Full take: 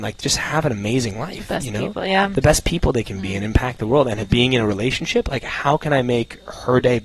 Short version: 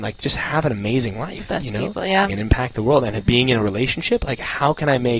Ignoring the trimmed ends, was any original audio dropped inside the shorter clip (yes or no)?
yes